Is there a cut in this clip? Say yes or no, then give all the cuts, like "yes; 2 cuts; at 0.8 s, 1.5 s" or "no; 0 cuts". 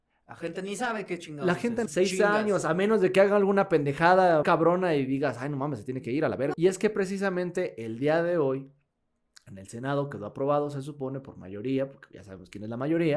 yes; 3 cuts; at 1.9 s, 4.4 s, 6.5 s